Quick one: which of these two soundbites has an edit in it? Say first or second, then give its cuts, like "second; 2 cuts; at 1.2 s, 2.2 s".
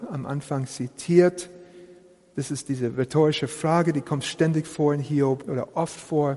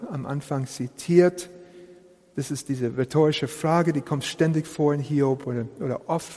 first; 1 cut; at 5.4 s